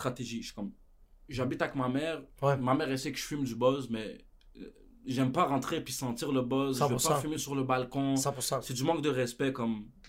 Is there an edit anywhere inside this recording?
no; 0 cuts

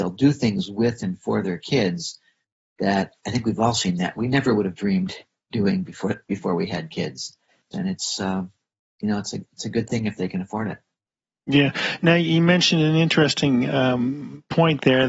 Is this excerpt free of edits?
no; 1 cut; at 7.7 s

